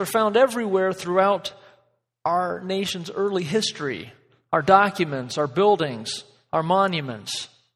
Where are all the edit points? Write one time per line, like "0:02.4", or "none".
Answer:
none